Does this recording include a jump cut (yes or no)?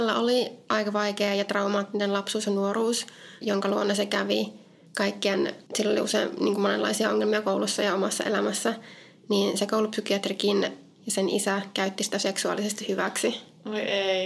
yes